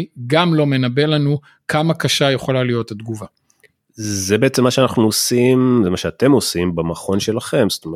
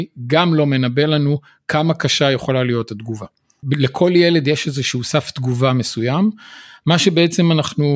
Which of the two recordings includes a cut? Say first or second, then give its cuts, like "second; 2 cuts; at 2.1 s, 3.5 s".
second; 1 cut; at 3.6 s